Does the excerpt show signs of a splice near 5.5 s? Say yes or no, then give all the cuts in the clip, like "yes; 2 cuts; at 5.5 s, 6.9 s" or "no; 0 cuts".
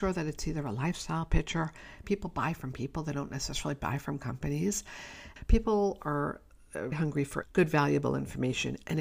no; 1 cut; at 2.0 s